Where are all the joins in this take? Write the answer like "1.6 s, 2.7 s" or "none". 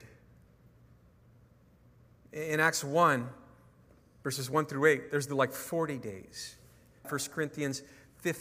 7.0 s

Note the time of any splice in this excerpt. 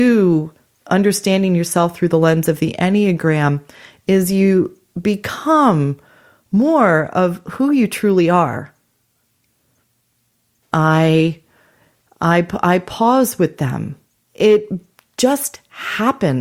10.6 s, 14.2 s

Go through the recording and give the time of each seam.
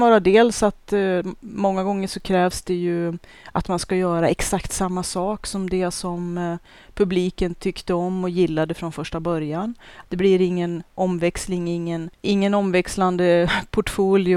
10.0 s

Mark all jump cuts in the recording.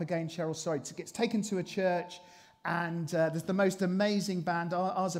none

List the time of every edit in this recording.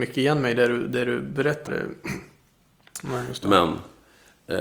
1.7 s, 3.0 s

